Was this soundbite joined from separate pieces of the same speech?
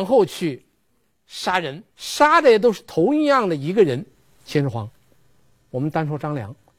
yes; 1 cut; at 1.9 s

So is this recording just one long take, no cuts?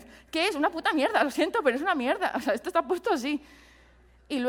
yes; 0 cuts

